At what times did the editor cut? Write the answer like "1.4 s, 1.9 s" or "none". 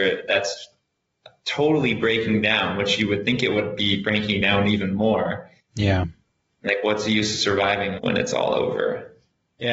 5.7 s, 8.0 s